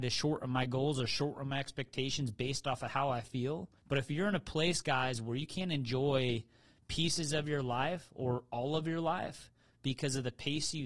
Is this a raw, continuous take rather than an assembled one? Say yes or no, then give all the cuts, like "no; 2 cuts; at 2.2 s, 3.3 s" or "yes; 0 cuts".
no; 1 cut; at 3.8 s